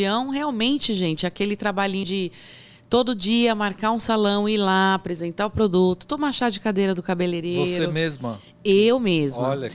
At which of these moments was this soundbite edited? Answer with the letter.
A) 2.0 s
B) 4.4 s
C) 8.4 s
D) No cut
A